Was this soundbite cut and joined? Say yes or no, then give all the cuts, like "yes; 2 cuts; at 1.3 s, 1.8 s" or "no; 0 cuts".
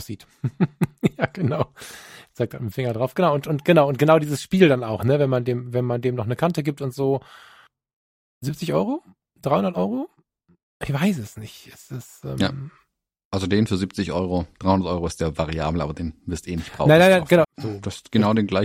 yes; 1 cut; at 17.4 s